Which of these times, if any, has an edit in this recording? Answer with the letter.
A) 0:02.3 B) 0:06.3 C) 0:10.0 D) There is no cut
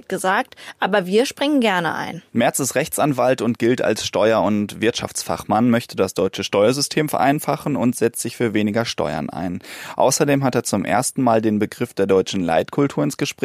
A